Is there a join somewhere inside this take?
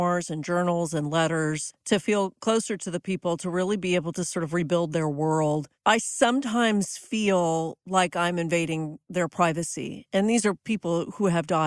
no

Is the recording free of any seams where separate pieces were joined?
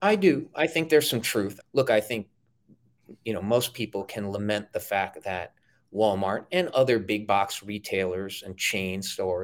no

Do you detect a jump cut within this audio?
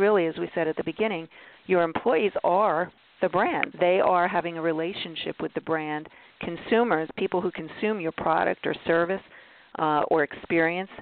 yes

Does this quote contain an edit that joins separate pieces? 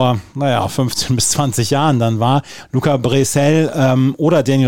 yes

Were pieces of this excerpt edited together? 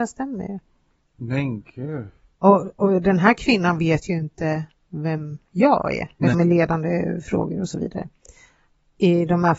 yes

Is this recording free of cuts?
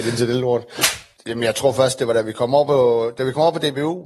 yes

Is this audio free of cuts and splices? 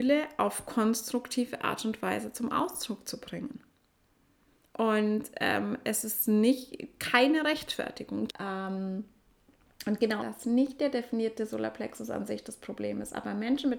no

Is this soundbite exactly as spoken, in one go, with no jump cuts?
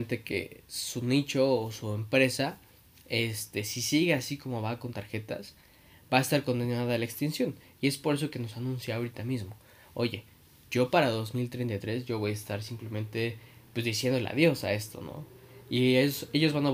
yes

